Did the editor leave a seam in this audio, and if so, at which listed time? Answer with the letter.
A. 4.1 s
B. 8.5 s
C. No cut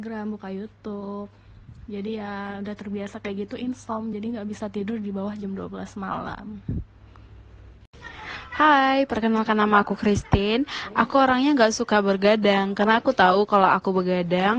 C